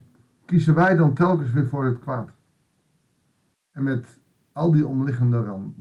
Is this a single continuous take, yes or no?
no